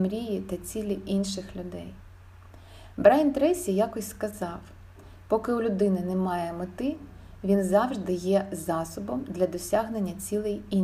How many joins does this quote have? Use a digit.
0